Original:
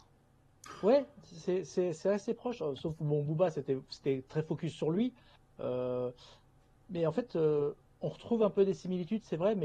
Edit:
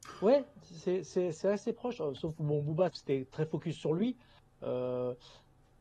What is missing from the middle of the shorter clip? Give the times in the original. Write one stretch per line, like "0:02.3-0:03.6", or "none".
0:03.5-0:03.9